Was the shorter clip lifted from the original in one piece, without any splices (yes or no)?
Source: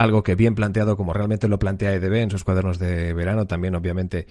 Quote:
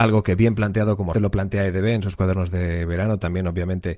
no